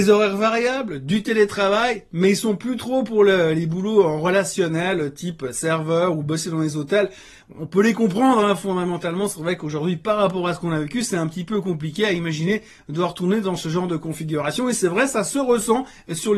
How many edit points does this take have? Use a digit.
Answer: 0